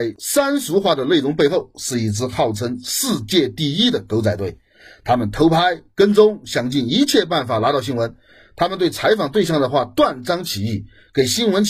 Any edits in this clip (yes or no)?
no